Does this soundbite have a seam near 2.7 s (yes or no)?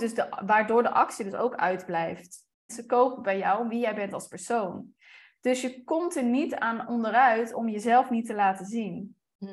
yes